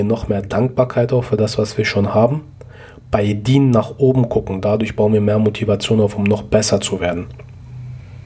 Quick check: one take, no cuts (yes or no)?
yes